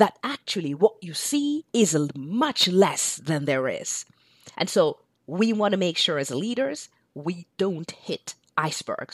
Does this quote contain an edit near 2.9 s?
no; 2 cuts; at 1.7 s, 4.5 s

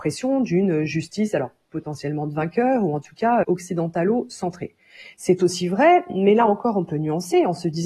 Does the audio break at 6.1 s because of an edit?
no; 1 cut; at 3.4 s

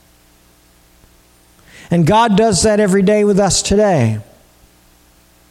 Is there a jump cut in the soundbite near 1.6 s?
no; 0 cuts

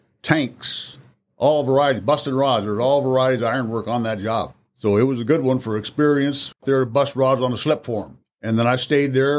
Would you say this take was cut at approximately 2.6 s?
no; 1 cut; at 6.5 s

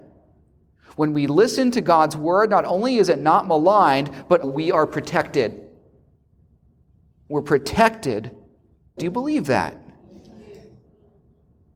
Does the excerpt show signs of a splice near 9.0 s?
yes; 2 cuts; at 4.4 s, 9.0 s

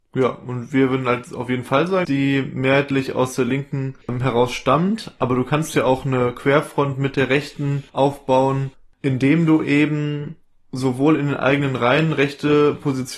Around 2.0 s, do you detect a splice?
yes; 1 cut; at 2.0 s

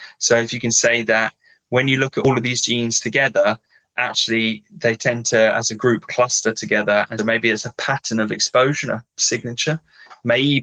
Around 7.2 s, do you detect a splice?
yes; 1 cut; at 7.2 s

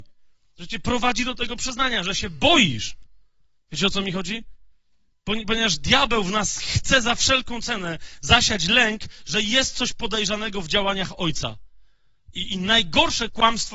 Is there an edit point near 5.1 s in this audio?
yes; 2 cuts; at 3.6 s, 5.1 s

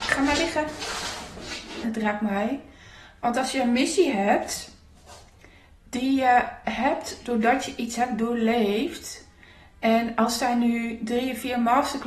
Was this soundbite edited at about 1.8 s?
yes; 1 cut; at 1.8 s

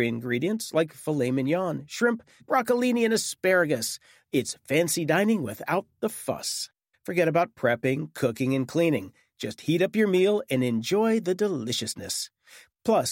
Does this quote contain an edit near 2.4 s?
yes; 2 cuts; at 2.4 s, 6.9 s

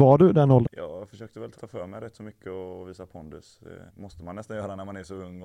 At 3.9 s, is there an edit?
yes; 2 cuts; at 1.6 s, 3.9 s

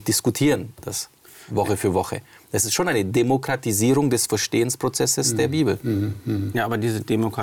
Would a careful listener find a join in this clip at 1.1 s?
no; 0 cuts

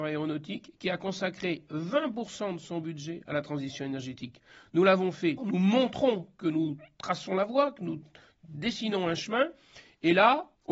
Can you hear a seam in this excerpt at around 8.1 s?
no; 1 cut; at 5.4 s

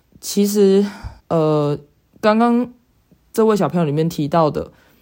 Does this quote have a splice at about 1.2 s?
yes; 1 cut; at 1.2 s

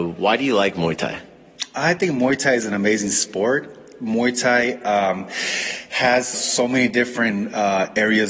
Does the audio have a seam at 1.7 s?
no; 1 cut; at 6.3 s

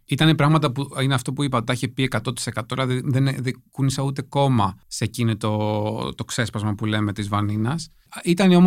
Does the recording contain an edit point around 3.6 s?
no; 1 cut; at 1.7 s

